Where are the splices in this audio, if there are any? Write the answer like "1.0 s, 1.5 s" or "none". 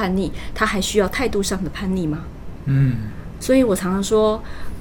none